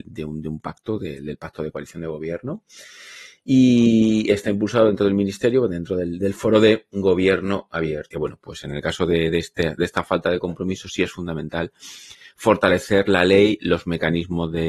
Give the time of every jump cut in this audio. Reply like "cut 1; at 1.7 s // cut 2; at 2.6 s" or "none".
cut 1; at 8.1 s